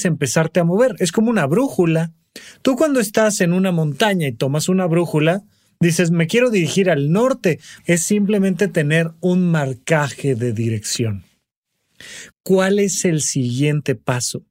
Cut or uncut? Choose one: cut